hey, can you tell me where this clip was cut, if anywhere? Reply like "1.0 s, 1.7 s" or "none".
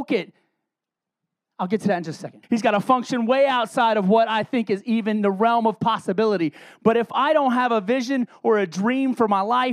2.4 s